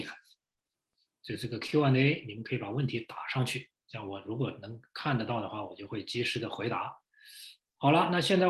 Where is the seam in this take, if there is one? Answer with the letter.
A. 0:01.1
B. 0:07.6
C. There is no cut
B